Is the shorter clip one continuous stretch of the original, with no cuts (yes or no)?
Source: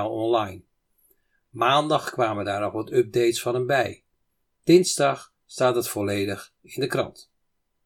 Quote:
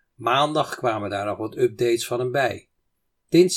yes